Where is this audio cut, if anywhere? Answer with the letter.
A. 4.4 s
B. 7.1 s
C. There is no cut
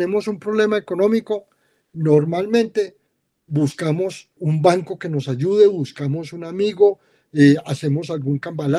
A